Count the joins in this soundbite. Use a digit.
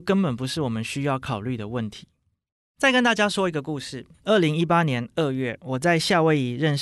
1